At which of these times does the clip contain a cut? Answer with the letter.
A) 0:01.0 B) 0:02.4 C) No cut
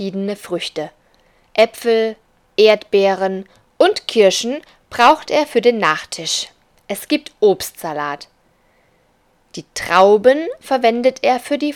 B